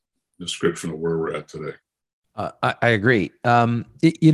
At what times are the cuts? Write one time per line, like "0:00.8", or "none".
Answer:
none